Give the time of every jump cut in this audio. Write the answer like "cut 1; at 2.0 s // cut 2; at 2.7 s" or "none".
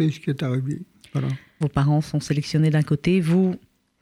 cut 1; at 1.6 s